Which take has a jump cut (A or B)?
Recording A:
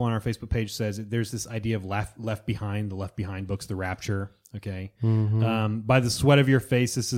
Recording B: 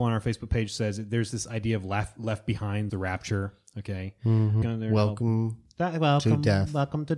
B